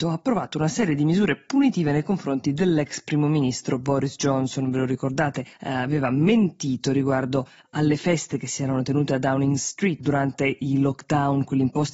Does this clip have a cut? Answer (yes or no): yes